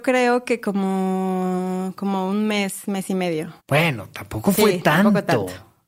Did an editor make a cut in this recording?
yes; 1 cut; at 3.6 s

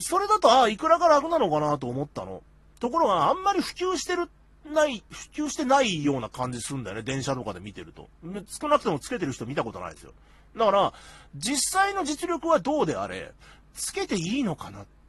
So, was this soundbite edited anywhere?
no; 0 cuts

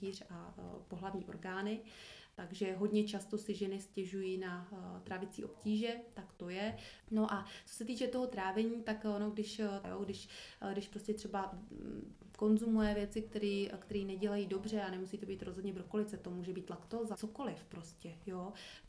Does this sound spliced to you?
yes; 3 cuts; at 7.0 s, 9.8 s, 17.1 s

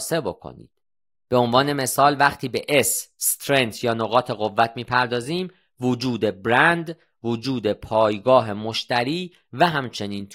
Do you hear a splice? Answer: yes; 1 cut; at 1.1 s

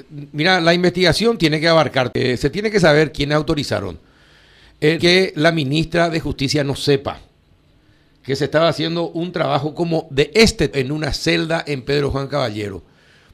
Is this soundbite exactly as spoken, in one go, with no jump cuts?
no; 2 cuts; at 5.0 s, 10.7 s

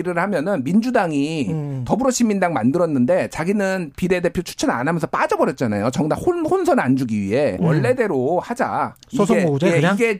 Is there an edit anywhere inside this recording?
yes; 1 cut; at 7.6 s

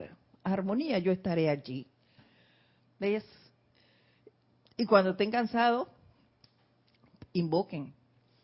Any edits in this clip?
yes; 1 cut; at 2.8 s

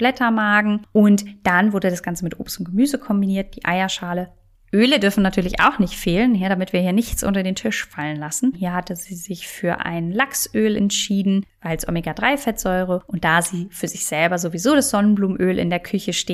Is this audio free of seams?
no; 1 cut; at 8.5 s

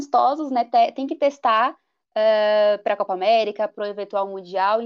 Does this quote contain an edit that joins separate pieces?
no; 0 cuts

